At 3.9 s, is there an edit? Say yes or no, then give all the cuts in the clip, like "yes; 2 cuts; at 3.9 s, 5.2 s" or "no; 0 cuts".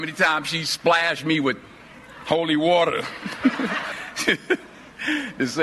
yes; 1 cut; at 3.9 s